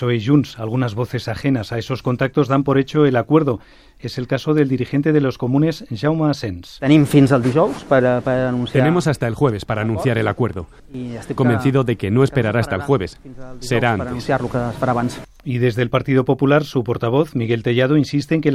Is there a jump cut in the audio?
yes; 1 cut; at 11.4 s

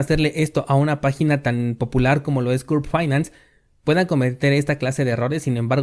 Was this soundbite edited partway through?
no; 0 cuts

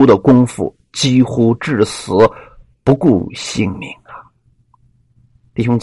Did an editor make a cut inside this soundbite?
no; 0 cuts

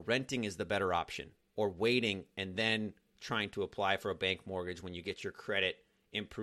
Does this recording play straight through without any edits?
yes; 0 cuts

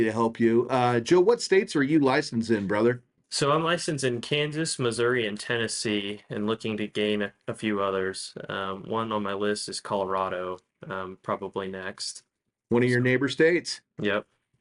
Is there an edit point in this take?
no; 0 cuts

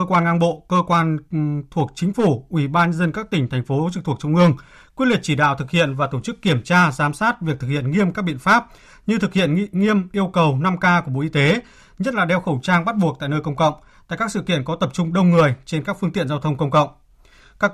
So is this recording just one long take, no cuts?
yes; 0 cuts

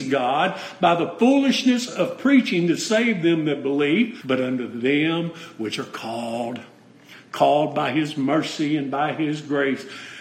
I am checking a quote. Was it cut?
yes; 1 cut; at 4.2 s

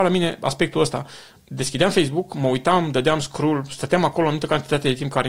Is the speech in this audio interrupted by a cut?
no; 0 cuts

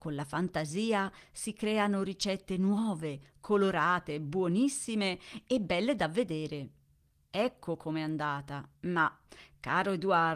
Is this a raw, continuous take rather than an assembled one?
no; 1 cut; at 8.7 s

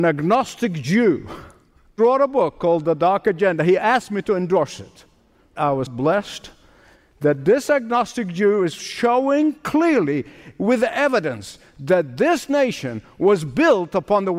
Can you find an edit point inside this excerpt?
yes; 1 cut; at 5.9 s

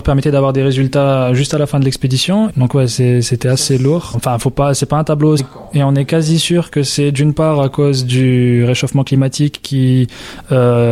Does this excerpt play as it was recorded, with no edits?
no; 3 cuts; at 2.5 s, 4.1 s, 5.4 s

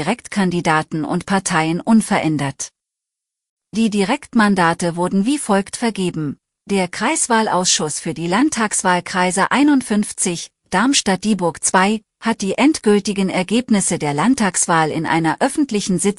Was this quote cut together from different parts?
yes; 2 cuts; at 6.6 s, 10.6 s

